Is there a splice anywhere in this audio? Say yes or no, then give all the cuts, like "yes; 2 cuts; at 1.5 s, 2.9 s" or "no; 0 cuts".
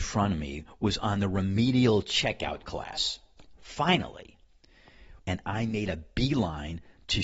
yes; 1 cut; at 5.2 s